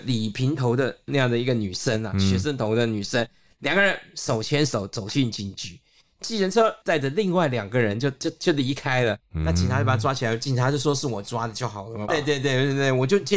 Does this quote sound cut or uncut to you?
cut